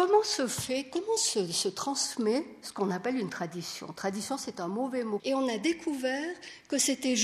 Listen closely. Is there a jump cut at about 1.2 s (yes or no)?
no